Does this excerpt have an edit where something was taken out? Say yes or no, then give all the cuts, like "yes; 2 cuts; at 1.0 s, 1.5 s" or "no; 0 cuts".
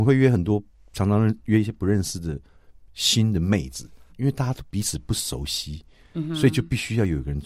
yes; 1 cut; at 4.1 s